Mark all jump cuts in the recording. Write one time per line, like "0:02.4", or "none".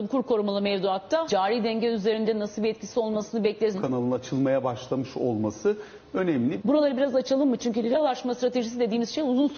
0:01.3
0:03.7
0:06.6